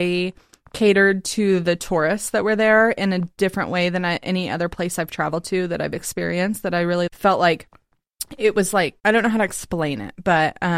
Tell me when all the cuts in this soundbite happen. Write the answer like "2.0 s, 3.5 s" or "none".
7.1 s, 9.0 s